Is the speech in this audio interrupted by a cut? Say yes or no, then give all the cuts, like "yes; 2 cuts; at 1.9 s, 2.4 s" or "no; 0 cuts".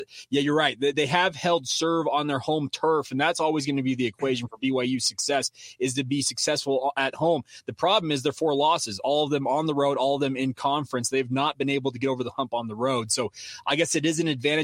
no; 0 cuts